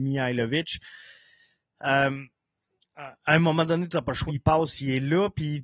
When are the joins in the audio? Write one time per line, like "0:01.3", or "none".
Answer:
0:04.3